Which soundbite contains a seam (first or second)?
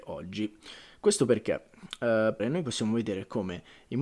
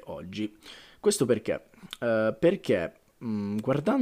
first